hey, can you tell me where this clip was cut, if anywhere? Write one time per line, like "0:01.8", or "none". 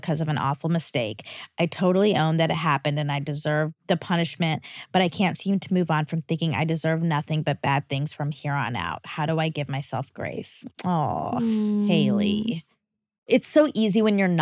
none